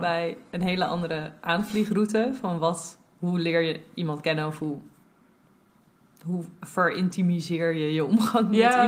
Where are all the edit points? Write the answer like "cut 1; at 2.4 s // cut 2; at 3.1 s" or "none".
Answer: none